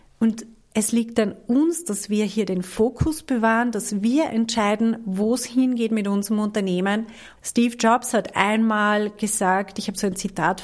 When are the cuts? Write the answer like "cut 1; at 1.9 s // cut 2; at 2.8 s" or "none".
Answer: cut 1; at 7.4 s

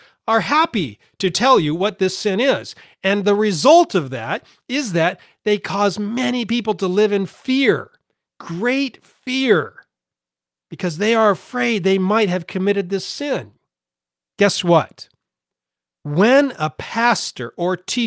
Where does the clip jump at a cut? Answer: none

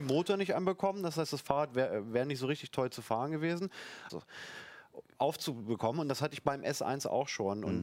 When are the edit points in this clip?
cut 1; at 4.1 s

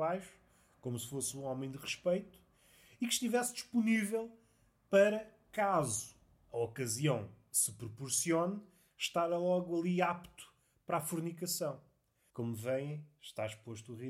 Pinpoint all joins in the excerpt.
cut 1; at 12.3 s

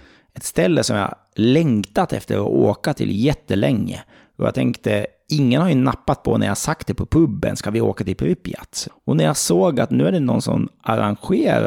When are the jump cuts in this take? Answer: cut 1; at 8.9 s

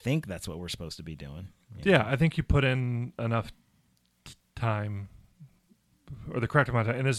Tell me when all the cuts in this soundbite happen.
none

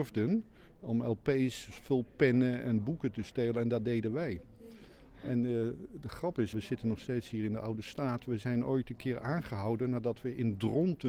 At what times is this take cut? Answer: cut 1; at 6.5 s

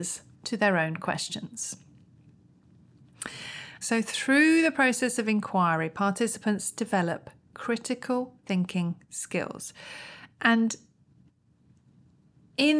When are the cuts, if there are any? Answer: cut 1; at 3.8 s

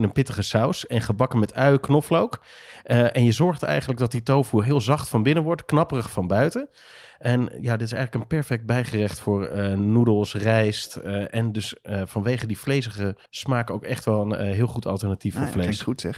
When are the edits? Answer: cut 1; at 13.3 s

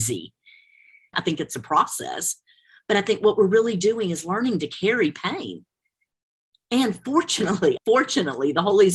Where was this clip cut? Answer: cut 1; at 1.1 s // cut 2; at 7.8 s

